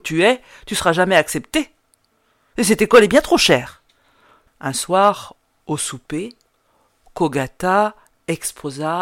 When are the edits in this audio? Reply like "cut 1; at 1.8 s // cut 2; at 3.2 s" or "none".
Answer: cut 1; at 4.5 s